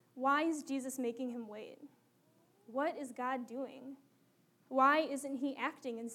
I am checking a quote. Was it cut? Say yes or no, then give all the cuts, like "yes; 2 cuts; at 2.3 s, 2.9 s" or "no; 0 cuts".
no; 0 cuts